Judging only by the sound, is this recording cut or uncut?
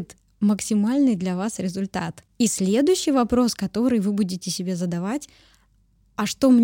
uncut